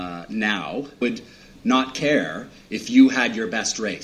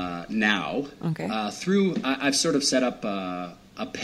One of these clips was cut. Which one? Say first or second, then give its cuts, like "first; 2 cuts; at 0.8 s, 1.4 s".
first; 1 cut; at 1.0 s